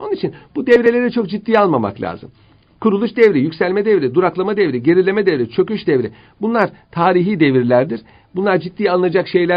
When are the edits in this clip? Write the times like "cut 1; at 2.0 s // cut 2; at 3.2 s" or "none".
none